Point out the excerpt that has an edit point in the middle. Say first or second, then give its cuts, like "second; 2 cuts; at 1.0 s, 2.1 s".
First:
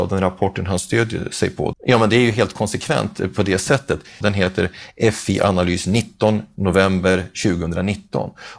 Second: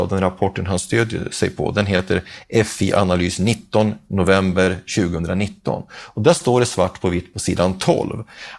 first; 2 cuts; at 1.7 s, 4.2 s